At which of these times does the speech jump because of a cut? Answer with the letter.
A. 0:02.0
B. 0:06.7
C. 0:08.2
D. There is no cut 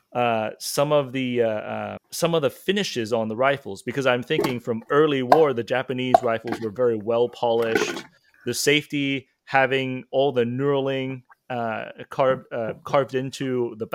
A